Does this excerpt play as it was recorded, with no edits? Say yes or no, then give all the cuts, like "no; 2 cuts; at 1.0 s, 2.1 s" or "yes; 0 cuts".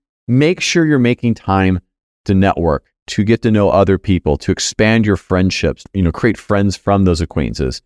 no; 1 cut; at 5.9 s